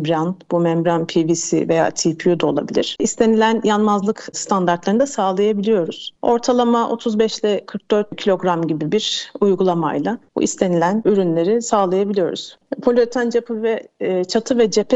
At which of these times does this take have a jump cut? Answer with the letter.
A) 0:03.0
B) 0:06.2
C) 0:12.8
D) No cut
A